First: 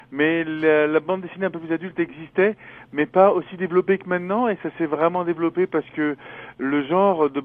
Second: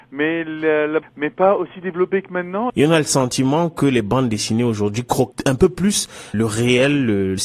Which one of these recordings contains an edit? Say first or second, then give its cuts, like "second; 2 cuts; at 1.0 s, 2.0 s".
second; 3 cuts; at 1.0 s, 2.7 s, 6.3 s